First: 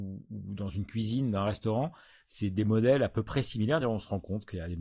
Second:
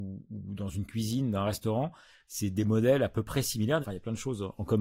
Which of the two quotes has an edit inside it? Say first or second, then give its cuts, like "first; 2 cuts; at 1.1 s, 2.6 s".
second; 1 cut; at 3.8 s